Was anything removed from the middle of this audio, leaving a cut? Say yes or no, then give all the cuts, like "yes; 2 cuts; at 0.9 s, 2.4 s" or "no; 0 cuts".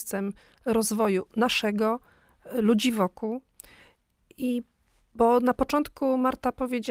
no; 0 cuts